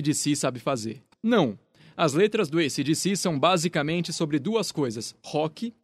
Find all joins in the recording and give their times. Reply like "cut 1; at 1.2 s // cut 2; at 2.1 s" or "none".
cut 1; at 1.1 s